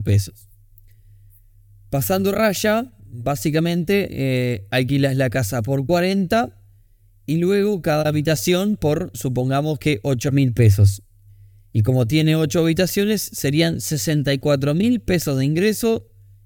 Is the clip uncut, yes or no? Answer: yes